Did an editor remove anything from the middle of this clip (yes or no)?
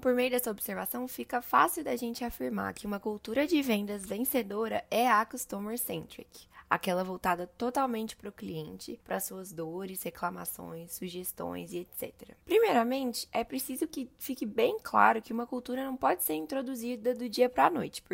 yes